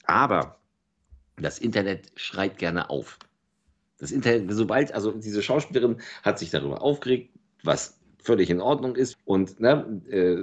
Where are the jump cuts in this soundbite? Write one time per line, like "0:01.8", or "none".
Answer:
0:09.1